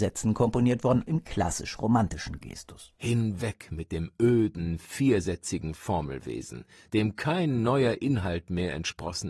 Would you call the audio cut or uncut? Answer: cut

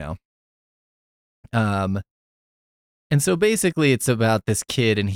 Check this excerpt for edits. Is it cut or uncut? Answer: uncut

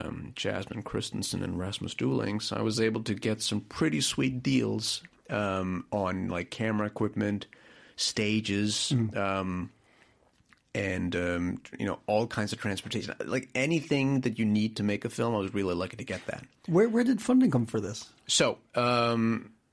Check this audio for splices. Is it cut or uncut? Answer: uncut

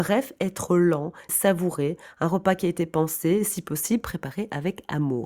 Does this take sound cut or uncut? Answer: cut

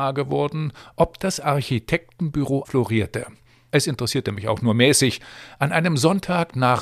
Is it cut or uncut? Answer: cut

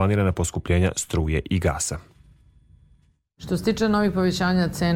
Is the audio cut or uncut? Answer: uncut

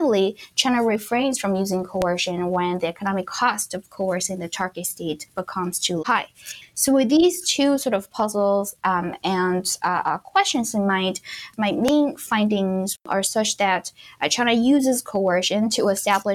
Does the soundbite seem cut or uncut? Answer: cut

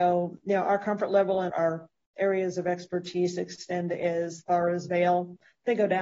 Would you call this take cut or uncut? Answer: cut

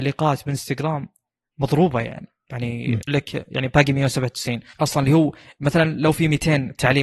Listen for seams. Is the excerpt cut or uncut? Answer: cut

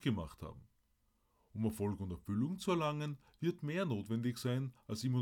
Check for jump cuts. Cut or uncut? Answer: uncut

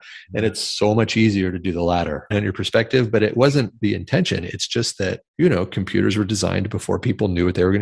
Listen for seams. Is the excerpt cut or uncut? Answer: cut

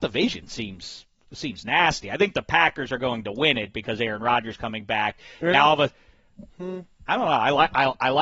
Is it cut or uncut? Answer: uncut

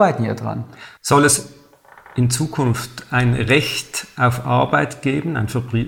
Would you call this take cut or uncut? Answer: uncut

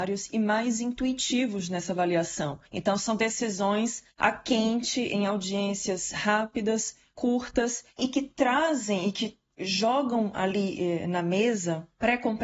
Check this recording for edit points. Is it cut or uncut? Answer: uncut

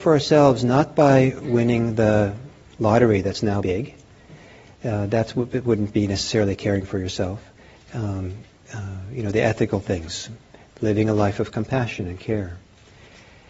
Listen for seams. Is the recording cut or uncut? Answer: cut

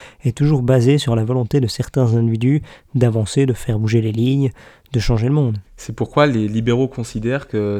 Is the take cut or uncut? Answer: cut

